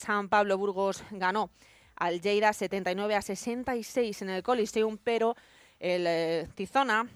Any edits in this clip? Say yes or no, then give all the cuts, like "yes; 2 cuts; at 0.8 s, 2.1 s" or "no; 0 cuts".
no; 0 cuts